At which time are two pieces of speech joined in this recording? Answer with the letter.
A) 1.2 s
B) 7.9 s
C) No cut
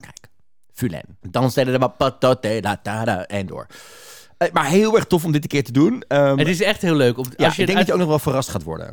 A